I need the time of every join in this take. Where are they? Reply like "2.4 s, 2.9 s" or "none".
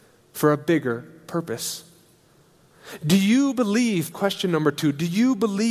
4.1 s